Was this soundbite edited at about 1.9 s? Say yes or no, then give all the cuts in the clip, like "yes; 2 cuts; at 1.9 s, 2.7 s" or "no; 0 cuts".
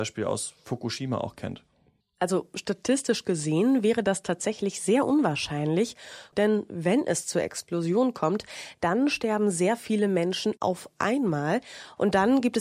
no; 1 cut; at 6.3 s